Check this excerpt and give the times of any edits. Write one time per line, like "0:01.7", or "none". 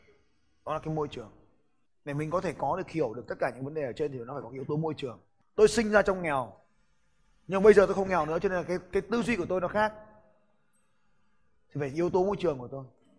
none